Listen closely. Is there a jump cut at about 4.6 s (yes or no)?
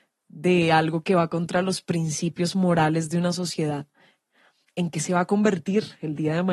yes